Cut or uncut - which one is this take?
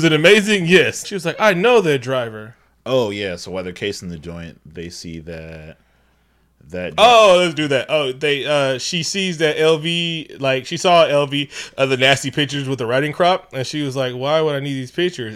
cut